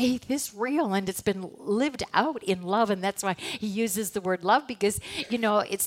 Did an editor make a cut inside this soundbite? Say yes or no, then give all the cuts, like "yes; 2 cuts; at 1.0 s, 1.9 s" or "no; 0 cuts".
no; 0 cuts